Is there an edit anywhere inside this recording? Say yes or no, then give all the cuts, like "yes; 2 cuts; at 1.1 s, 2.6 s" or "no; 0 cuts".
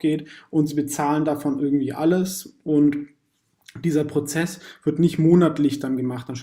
no; 0 cuts